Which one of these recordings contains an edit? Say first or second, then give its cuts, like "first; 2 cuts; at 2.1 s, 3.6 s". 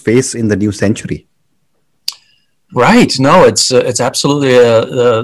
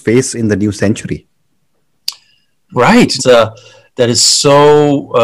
second; 1 cut; at 3.2 s